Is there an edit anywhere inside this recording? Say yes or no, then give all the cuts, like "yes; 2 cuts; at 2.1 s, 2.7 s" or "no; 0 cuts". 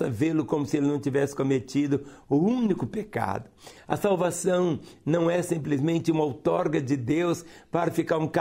yes; 1 cut; at 3.8 s